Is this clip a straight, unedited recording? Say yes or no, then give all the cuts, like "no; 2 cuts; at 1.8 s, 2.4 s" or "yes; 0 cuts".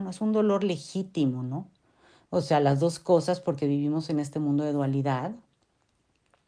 no; 1 cut; at 2.2 s